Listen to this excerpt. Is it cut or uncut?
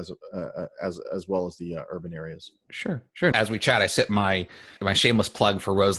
cut